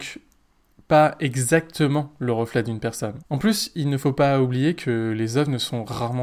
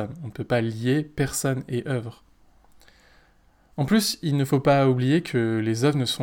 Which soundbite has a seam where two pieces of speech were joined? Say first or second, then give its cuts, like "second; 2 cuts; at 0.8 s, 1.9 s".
first; 1 cut; at 3.2 s